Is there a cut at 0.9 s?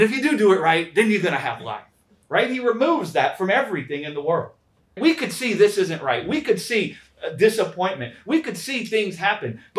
no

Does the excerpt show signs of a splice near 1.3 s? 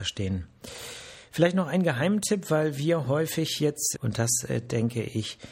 no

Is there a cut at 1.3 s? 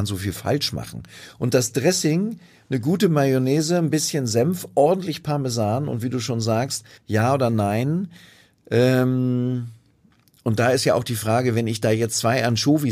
no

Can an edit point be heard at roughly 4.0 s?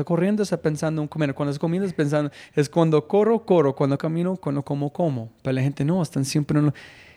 yes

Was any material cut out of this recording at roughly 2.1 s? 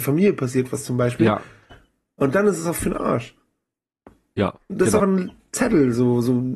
no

